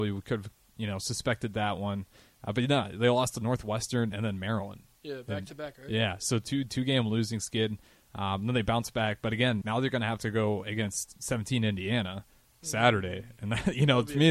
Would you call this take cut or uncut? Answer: cut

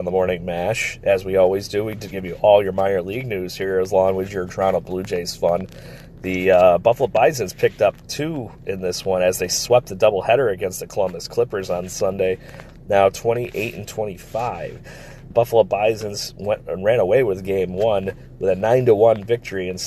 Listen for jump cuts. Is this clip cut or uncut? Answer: cut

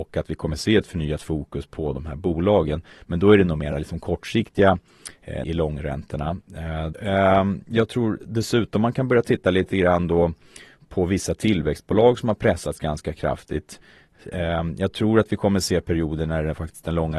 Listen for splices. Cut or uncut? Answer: cut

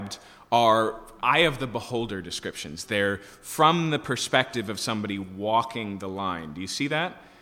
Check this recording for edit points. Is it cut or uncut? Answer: cut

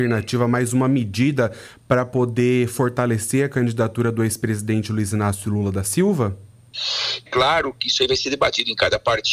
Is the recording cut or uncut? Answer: cut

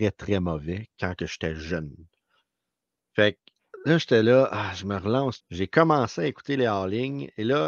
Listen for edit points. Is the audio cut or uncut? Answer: cut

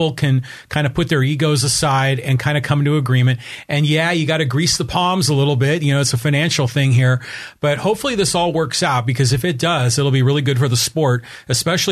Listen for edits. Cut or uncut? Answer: uncut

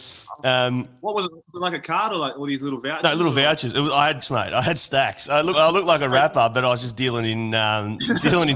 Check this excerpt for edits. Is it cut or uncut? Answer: cut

